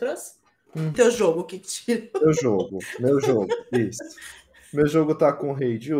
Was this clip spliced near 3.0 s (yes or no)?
no